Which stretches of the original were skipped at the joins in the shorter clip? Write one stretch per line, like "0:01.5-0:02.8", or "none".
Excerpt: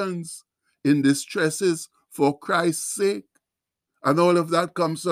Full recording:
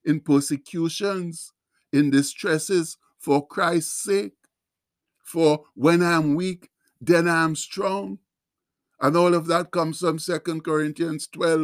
0:04.9-0:08.8